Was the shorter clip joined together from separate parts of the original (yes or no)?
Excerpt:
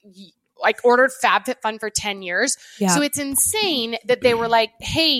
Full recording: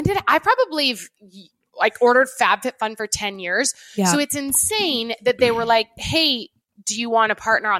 no